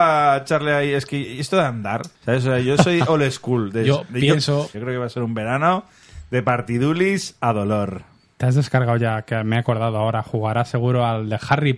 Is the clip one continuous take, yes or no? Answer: no